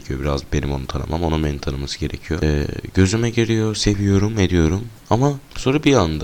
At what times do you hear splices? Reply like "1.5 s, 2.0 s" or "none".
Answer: none